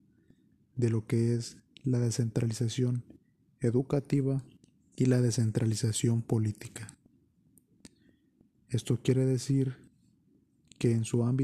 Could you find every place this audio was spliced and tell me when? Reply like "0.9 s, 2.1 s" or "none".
8.5 s